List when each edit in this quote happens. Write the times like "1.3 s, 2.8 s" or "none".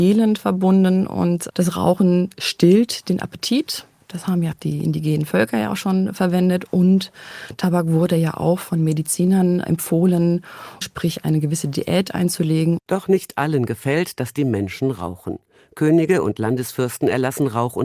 10.8 s, 12.8 s